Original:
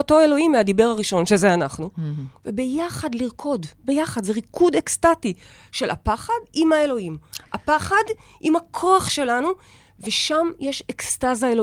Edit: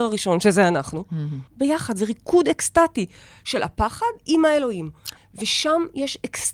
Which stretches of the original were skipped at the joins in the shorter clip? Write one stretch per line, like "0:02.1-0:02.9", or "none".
0:02.3-0:03.7
0:07.4-0:09.8